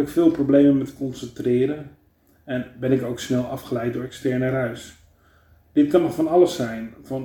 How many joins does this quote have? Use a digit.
0